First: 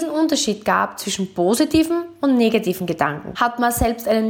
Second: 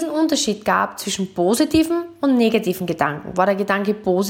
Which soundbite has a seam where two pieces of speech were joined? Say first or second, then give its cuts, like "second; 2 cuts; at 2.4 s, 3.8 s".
first; 1 cut; at 3.3 s